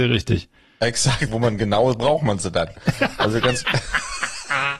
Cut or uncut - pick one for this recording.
cut